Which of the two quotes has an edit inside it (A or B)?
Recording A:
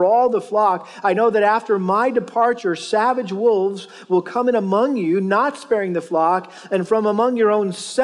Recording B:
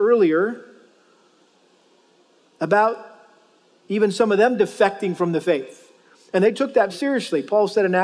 B